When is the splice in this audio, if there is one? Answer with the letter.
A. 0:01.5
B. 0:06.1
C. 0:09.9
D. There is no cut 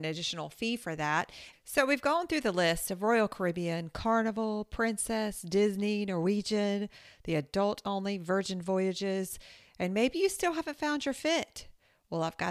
A